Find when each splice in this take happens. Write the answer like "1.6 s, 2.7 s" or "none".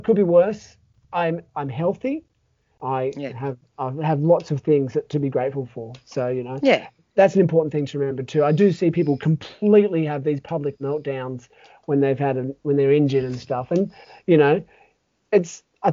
none